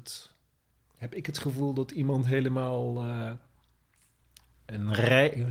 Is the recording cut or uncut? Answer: uncut